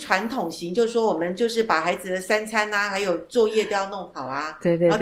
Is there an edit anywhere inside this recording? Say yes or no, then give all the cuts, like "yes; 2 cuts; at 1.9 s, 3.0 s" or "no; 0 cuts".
no; 0 cuts